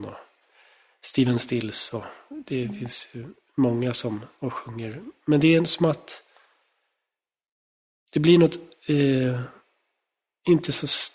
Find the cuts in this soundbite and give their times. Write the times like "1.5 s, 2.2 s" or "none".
4.4 s